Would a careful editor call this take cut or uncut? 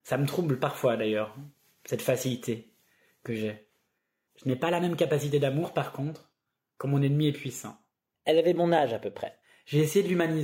cut